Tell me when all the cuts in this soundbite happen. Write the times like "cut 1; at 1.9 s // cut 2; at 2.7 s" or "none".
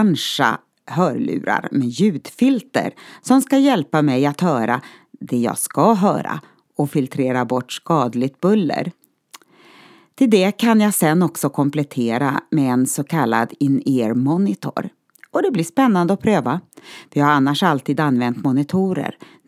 none